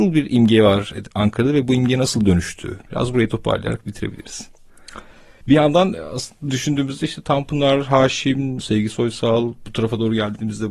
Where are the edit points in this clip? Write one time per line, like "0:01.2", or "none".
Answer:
0:05.4
0:08.6